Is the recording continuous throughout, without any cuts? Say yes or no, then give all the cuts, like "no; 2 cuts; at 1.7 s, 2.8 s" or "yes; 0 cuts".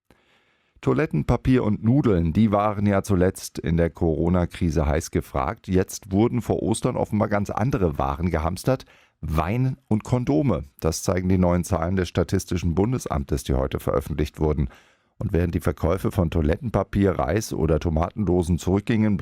no; 1 cut; at 5.6 s